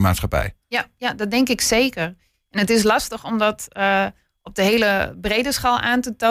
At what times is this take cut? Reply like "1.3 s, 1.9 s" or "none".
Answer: none